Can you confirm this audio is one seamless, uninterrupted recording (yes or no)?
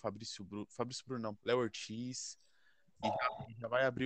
no